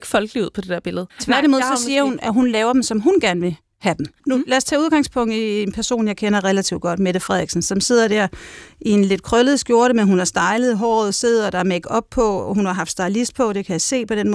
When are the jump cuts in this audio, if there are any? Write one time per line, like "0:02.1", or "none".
0:01.1